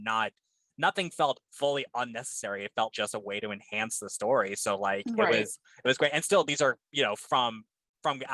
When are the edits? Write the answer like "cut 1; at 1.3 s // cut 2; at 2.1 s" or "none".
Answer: cut 1; at 2.9 s